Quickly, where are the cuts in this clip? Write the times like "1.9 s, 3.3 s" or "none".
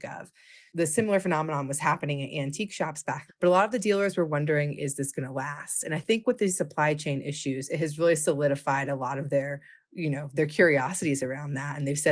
3.3 s